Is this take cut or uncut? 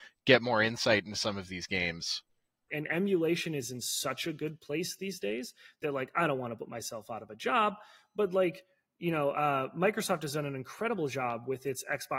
cut